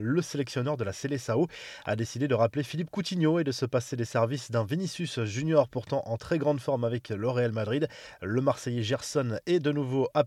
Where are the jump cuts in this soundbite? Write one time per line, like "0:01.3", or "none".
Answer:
none